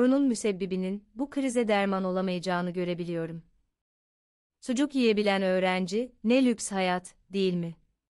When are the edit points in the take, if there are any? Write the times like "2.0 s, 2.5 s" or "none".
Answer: 4.5 s